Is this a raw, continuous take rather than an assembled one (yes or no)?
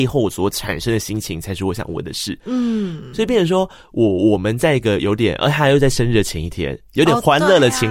yes